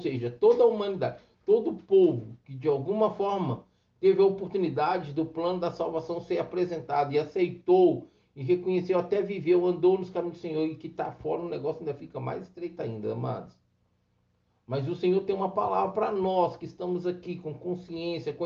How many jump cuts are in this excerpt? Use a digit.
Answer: 0